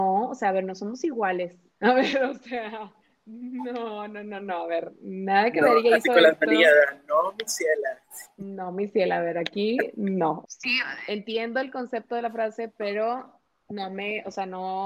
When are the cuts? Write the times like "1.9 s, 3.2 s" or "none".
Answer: 10.4 s